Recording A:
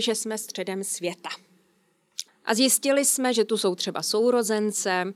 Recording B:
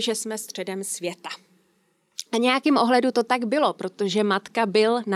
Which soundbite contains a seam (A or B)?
A